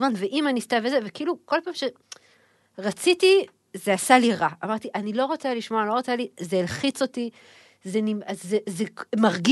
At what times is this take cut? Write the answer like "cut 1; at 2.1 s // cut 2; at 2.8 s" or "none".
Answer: none